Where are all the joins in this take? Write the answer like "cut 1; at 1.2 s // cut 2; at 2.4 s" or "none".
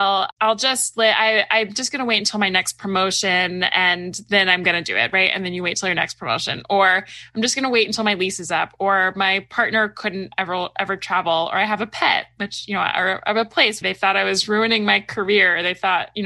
cut 1; at 13.8 s